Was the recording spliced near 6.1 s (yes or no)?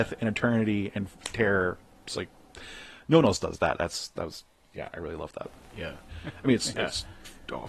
yes